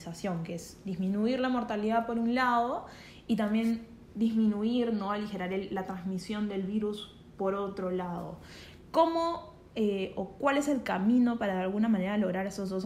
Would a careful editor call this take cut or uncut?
uncut